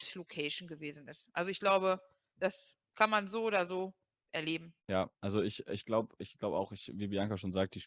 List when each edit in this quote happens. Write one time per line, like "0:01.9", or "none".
0:04.8

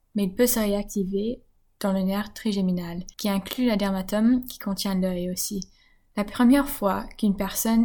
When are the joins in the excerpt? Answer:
0:03.1
0:06.1

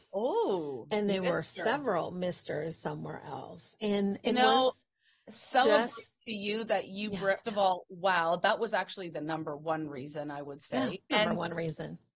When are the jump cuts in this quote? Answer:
0:07.4
0:11.1

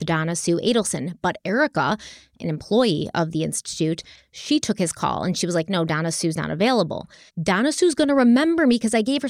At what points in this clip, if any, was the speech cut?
0:07.3

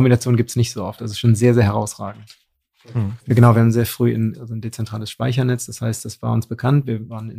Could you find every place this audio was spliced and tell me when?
0:03.2
0:04.3

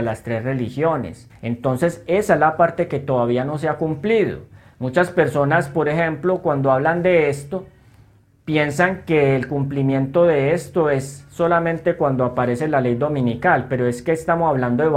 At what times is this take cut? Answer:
0:01.3

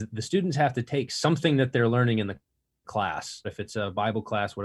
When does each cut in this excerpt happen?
0:03.4

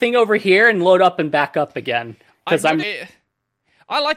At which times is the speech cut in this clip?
0:02.8

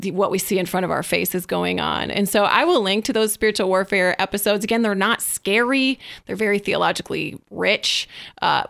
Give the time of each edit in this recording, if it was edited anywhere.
none

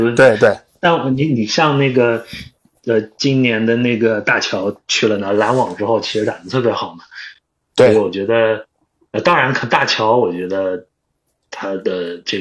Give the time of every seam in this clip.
none

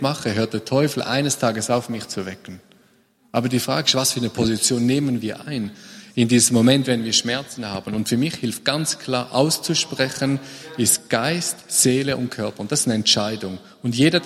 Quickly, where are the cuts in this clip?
none

